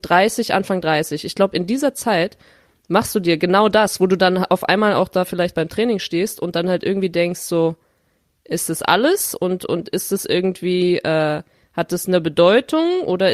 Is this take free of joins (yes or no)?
yes